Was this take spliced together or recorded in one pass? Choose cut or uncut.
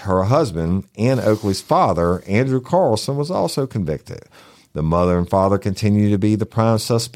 uncut